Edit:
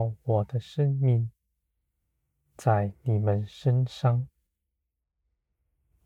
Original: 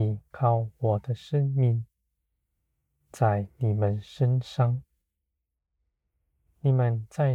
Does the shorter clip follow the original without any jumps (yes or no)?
yes